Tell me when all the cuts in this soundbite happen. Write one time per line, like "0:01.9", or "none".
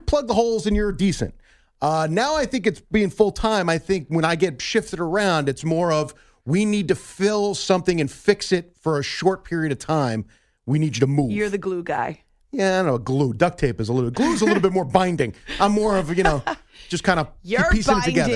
none